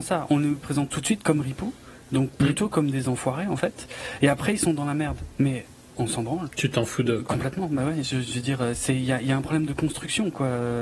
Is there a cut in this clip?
no; 0 cuts

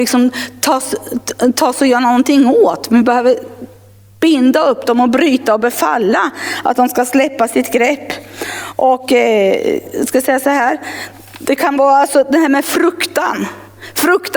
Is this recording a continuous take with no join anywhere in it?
yes; 0 cuts

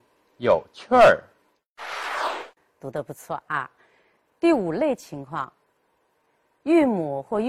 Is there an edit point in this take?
no; 0 cuts

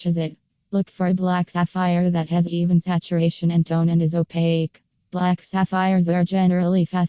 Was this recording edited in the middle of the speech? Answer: no; 0 cuts

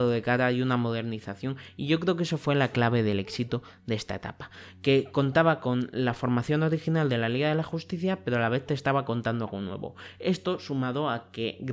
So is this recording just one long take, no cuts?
yes; 0 cuts

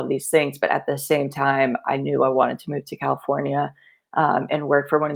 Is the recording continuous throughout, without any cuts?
yes; 0 cuts

